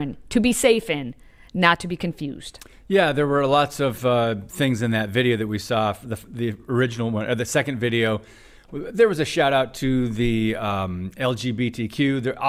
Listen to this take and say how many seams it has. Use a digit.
0